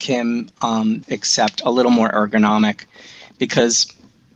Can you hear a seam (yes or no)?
yes